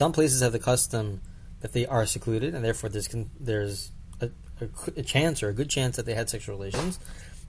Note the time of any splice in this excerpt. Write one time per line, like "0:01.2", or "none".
none

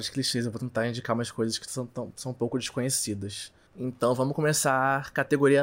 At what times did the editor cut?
0:03.7

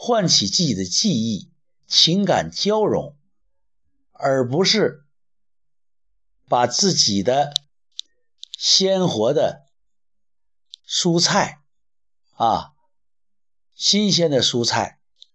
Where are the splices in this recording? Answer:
none

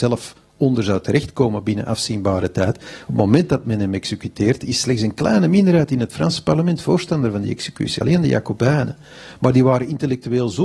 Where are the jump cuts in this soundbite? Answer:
none

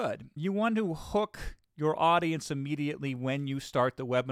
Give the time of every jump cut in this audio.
none

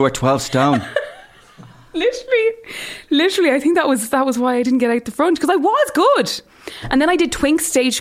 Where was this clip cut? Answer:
none

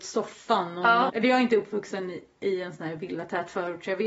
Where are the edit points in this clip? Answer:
0:01.1

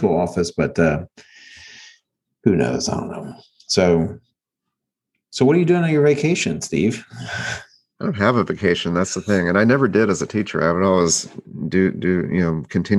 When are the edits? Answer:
none

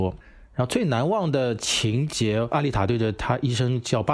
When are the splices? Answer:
none

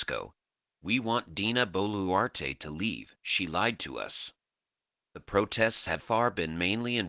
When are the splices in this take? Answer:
0:06.0

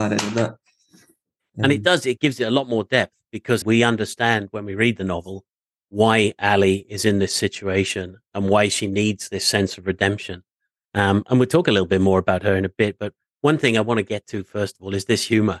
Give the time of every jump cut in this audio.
0:03.6

